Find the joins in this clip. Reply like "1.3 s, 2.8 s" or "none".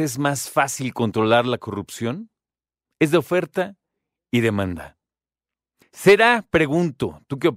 2.9 s, 5.8 s